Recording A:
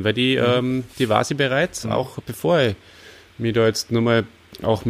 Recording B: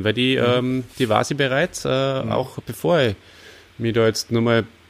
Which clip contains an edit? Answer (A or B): A